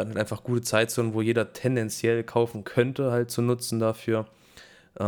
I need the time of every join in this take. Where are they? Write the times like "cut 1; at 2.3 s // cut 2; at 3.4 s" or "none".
none